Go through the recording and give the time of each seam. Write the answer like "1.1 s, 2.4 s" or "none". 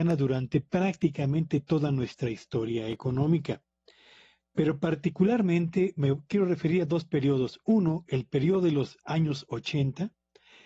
none